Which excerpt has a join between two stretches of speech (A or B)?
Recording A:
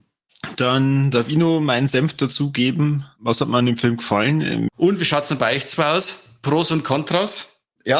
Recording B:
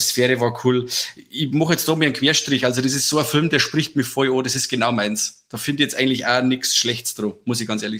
A